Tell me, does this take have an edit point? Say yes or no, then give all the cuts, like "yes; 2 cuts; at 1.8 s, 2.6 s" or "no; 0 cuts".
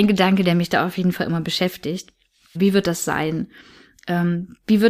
yes; 1 cut; at 2.6 s